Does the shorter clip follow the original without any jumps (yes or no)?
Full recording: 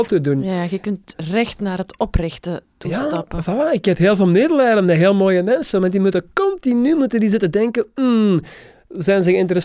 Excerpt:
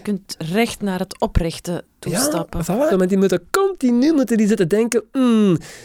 no